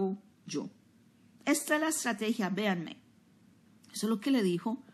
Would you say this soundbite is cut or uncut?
cut